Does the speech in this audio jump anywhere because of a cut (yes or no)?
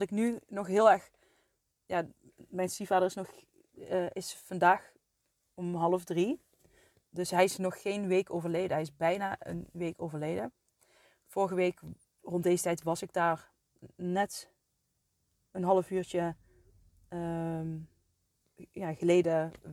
no